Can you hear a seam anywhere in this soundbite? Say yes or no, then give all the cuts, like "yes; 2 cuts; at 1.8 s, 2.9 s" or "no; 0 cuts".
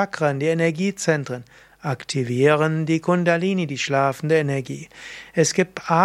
no; 0 cuts